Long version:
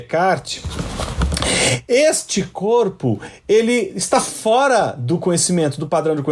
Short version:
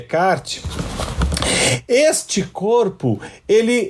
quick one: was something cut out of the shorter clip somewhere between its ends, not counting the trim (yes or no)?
no